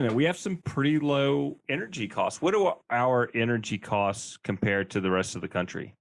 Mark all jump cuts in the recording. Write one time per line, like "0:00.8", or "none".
none